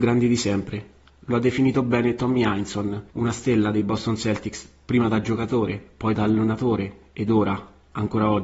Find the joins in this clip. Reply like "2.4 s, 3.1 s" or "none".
3.1 s